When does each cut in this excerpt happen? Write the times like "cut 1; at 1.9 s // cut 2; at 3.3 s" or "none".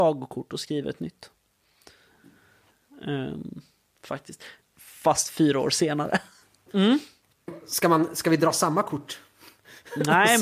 cut 1; at 4.6 s // cut 2; at 6.7 s